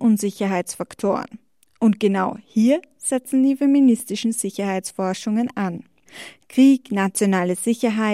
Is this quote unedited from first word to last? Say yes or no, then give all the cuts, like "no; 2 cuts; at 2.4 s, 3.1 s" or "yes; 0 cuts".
yes; 0 cuts